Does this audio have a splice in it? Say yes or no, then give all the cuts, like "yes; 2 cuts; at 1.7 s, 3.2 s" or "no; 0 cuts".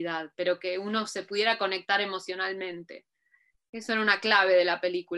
no; 0 cuts